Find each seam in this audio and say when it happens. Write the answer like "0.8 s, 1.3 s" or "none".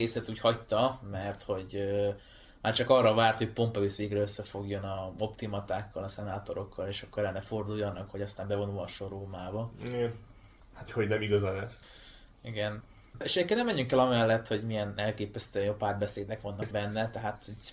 10.9 s